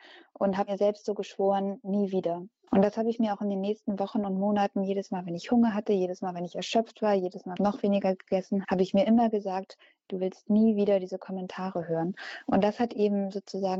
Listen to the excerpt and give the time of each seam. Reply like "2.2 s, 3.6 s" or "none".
2.7 s, 7.6 s, 8.6 s